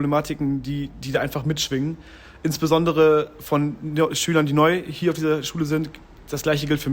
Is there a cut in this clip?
no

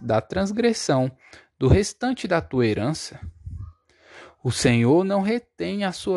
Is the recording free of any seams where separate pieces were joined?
yes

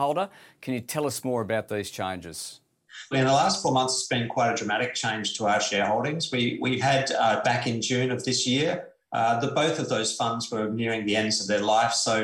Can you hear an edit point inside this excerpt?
yes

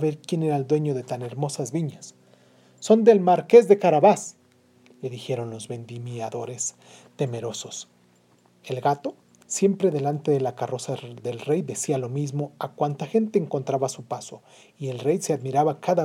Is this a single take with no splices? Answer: yes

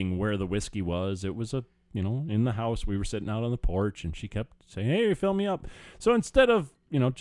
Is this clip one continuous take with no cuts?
yes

